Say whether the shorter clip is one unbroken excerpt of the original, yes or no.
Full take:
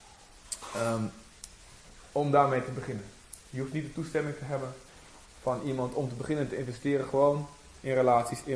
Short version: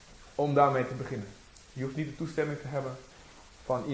yes